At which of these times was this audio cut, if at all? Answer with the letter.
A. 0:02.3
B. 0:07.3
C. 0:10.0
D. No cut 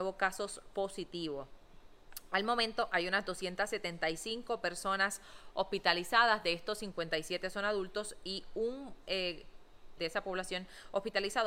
C